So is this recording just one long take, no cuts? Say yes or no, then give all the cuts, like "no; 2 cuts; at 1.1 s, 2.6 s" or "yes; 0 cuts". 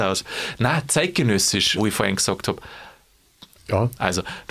no; 2 cuts; at 1.8 s, 3.6 s